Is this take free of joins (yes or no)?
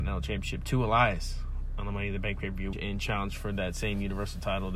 no